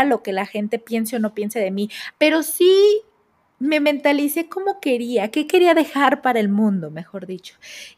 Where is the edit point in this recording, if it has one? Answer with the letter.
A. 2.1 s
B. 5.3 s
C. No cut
A